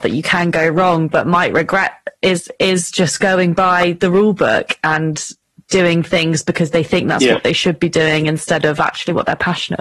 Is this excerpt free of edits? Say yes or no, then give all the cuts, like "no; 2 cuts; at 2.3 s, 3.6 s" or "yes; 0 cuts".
yes; 0 cuts